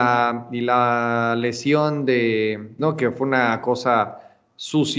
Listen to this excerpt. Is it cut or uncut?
cut